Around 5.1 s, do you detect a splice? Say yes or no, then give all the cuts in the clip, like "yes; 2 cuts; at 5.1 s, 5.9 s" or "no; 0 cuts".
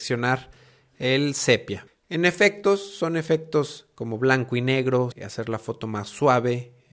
yes; 2 cuts; at 1.9 s, 5.1 s